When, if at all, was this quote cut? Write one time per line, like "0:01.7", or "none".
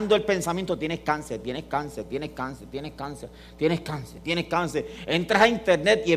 none